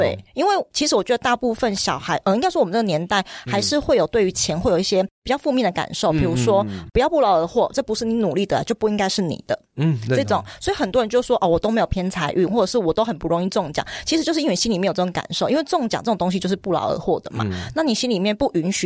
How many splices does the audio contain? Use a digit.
1